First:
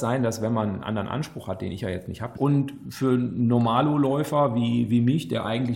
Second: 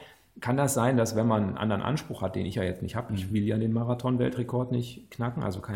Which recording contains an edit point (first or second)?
first